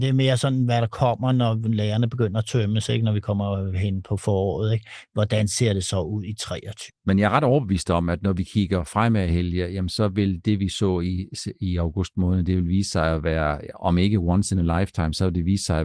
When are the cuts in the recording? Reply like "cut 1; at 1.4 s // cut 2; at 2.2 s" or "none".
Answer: cut 1; at 6.9 s